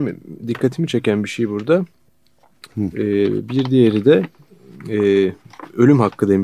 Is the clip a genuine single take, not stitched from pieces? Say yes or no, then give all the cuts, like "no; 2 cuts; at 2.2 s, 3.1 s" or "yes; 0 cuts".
no; 1 cut; at 2.7 s